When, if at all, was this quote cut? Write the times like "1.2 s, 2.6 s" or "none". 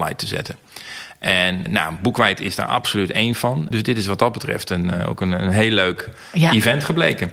1.7 s, 3.7 s